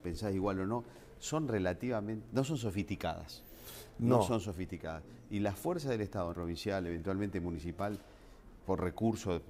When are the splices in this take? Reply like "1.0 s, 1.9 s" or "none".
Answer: 6.3 s, 8.6 s